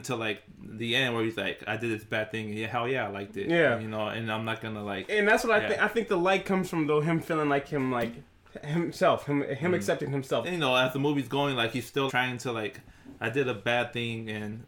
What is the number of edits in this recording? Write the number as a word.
two